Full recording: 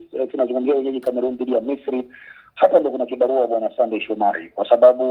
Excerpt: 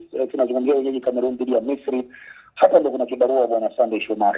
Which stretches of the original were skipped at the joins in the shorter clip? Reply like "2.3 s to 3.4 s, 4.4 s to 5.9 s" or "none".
none